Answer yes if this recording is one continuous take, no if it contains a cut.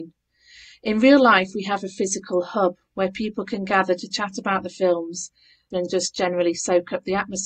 no